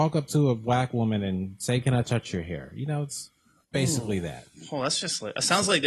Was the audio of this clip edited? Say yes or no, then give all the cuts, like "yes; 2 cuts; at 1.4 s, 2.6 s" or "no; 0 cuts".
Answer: no; 0 cuts